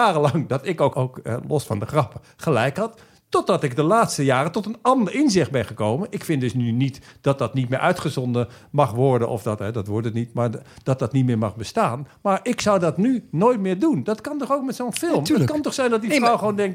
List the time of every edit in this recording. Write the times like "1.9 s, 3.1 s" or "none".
0.9 s